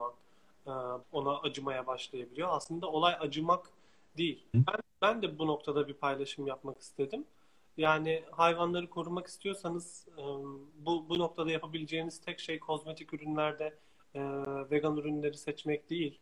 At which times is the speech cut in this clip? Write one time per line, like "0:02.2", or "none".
0:01.0
0:04.5